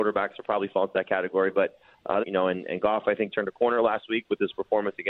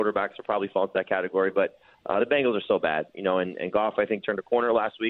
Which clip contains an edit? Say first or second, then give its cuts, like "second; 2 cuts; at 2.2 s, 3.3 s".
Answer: first; 1 cut; at 2.2 s